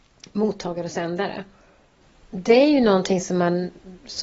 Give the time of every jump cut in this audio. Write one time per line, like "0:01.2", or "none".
none